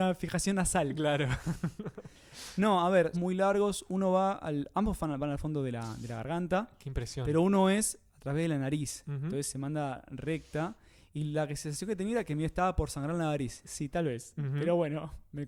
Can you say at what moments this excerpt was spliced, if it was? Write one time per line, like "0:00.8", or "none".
0:03.1
0:13.6